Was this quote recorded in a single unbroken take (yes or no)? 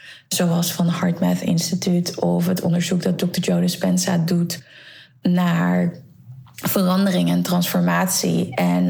yes